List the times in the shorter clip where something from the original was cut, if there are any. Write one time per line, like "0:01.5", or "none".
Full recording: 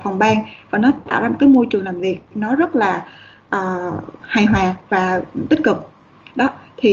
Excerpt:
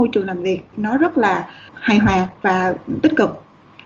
0:01.7